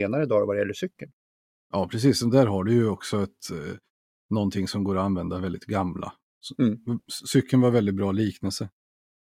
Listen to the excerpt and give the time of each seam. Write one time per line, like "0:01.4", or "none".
none